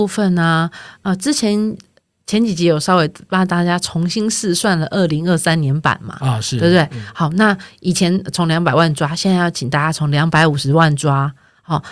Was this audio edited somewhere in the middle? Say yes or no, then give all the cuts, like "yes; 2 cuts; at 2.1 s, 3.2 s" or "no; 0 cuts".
no; 0 cuts